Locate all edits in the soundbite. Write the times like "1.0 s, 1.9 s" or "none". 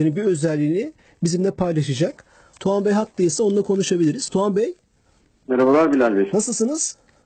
none